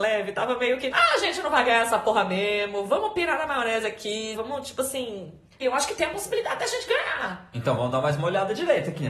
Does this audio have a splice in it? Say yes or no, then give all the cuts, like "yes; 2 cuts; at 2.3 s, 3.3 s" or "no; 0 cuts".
yes; 3 cuts; at 0.9 s, 4.3 s, 5.6 s